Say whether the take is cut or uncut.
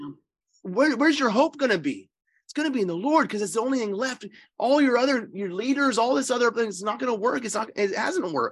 uncut